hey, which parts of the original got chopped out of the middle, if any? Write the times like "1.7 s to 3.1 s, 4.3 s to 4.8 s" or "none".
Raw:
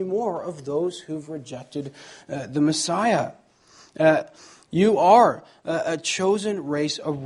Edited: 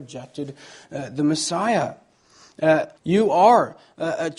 4.3 s to 4.6 s